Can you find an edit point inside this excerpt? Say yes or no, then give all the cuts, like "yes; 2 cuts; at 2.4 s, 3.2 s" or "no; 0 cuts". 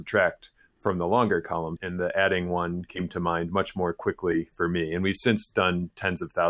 yes; 1 cut; at 1.8 s